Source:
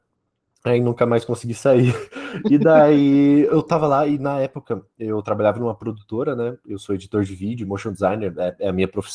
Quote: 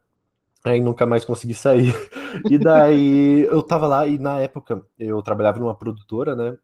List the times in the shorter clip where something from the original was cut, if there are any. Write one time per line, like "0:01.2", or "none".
none